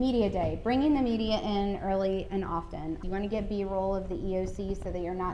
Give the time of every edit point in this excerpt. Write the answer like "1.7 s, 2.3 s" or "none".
3.0 s